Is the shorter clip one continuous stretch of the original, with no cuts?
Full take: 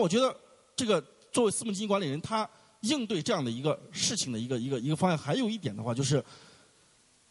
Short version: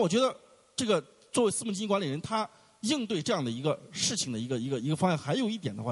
yes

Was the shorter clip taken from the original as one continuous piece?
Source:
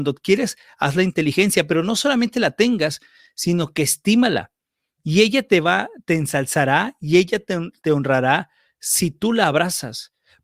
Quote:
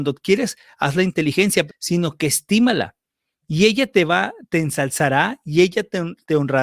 no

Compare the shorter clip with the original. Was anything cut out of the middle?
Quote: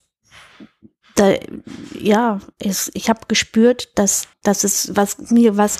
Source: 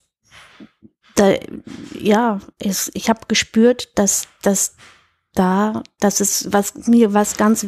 yes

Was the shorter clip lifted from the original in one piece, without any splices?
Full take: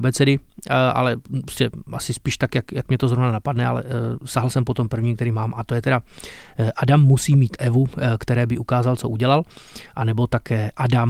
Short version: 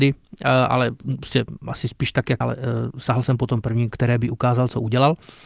no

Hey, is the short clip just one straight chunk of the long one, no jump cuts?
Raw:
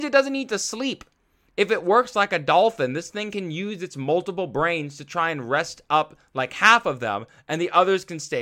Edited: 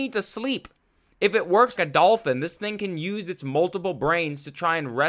no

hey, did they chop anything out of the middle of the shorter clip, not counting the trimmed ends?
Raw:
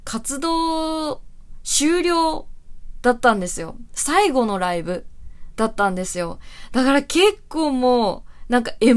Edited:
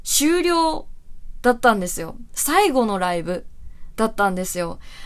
no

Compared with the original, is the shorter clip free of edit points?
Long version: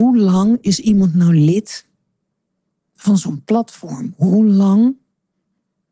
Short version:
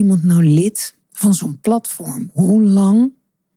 no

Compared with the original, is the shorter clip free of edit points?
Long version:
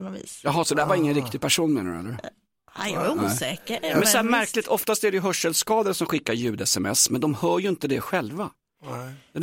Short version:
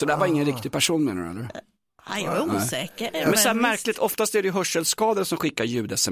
yes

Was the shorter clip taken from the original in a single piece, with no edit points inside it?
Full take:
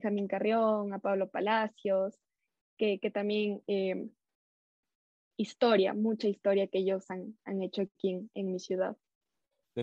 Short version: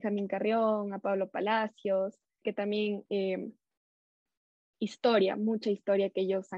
no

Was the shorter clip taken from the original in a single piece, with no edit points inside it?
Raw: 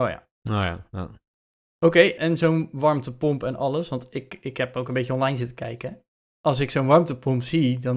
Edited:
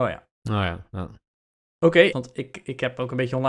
no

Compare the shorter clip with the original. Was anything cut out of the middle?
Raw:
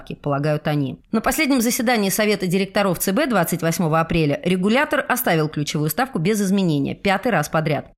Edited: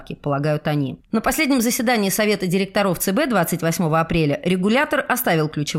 no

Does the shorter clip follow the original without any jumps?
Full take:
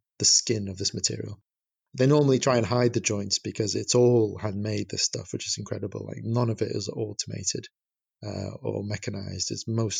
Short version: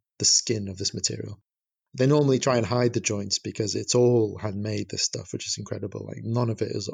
yes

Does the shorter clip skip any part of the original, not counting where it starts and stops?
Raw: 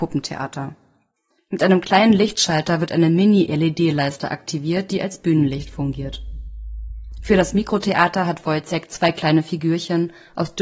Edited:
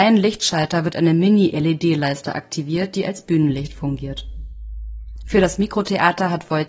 no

